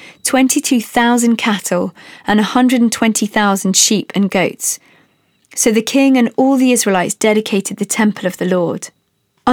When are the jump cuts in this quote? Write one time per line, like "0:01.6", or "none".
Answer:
none